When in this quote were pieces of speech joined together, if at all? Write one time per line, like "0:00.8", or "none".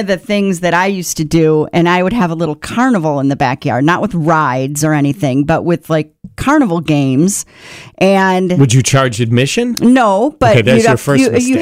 none